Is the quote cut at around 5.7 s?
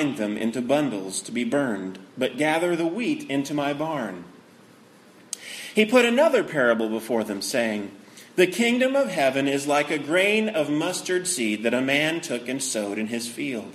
no; 0 cuts

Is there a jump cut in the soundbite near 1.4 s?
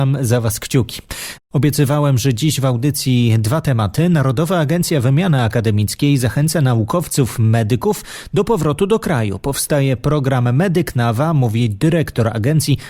yes; 1 cut; at 1.4 s

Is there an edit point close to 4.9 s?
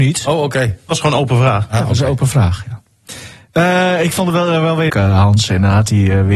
yes; 1 cut; at 4.9 s

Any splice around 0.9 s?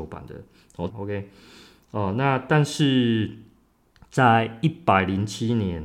yes; 1 cut; at 0.9 s

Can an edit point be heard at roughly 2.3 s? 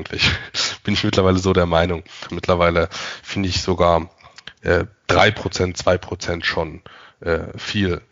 yes; 1 cut; at 2.3 s

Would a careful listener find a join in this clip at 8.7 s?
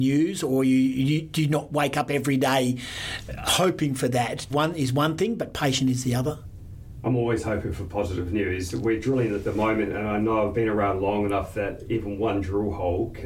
no; 1 cut; at 4.5 s

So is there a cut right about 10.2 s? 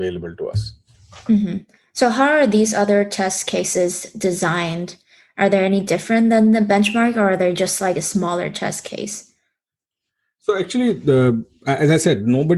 no; 0 cuts

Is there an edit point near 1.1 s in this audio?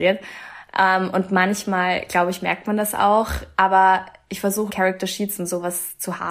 no; 1 cut; at 4.7 s

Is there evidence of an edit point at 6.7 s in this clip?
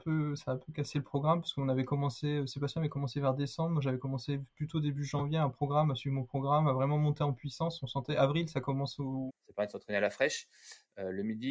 no; 1 cut; at 9.3 s

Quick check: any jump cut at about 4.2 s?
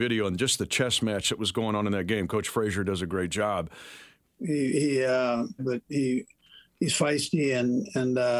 yes; 2 cuts; at 4.2 s, 5.6 s

